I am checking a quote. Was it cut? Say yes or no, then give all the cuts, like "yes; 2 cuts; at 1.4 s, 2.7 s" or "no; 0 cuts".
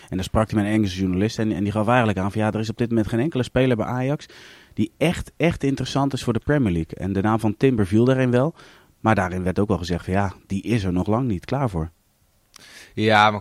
no; 0 cuts